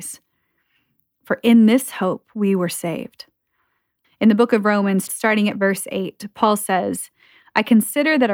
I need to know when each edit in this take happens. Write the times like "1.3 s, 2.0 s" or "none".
4.0 s, 5.1 s